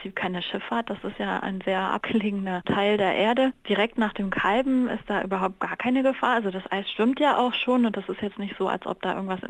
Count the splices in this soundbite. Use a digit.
0